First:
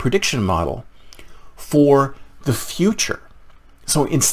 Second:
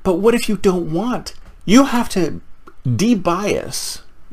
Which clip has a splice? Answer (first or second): second